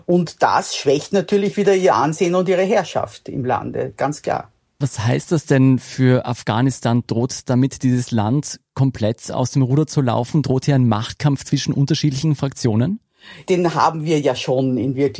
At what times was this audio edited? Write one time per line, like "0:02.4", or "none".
none